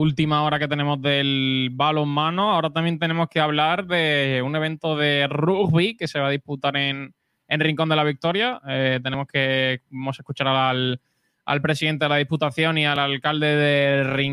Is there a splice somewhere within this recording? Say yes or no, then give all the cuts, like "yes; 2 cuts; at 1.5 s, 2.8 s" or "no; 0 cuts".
no; 0 cuts